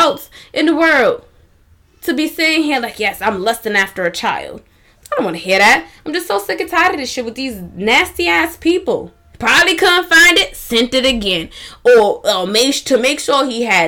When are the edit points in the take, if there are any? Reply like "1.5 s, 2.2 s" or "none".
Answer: 4.9 s, 9.3 s